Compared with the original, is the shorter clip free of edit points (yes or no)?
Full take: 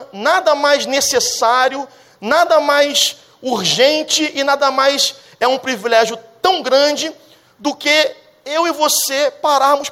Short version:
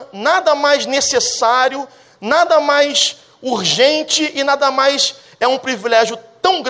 yes